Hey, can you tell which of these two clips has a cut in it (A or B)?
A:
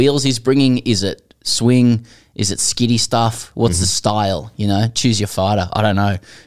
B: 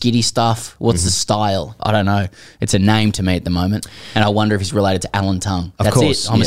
B